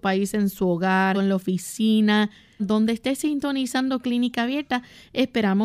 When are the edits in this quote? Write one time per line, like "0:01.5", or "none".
0:01.1
0:02.6